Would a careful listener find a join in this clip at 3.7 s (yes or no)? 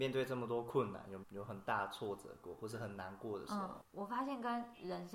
no